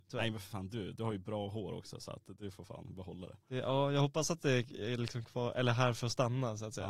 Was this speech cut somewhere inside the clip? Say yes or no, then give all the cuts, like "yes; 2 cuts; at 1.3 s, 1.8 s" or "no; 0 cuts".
yes; 1 cut; at 5.2 s